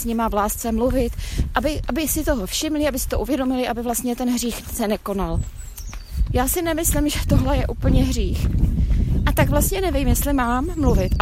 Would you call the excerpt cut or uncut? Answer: uncut